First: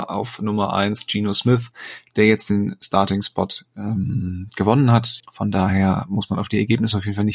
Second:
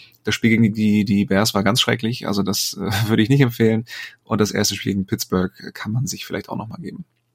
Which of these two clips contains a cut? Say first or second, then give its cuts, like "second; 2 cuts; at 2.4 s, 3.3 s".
first; 1 cut; at 5.2 s